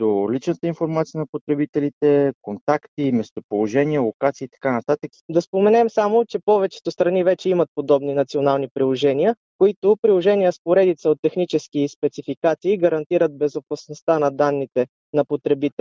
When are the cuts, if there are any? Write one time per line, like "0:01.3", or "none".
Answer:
0:05.1